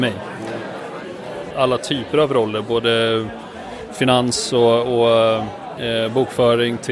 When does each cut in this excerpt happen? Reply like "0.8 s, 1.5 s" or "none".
1.5 s